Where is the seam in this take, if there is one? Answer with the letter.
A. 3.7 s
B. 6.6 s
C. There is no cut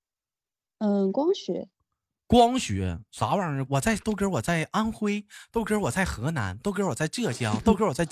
A